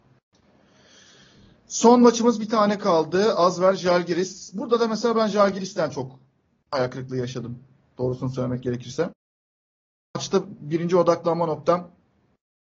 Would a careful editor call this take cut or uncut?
uncut